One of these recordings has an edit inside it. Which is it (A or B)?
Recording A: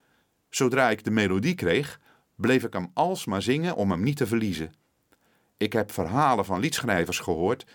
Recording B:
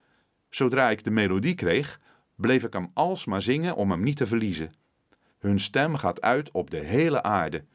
B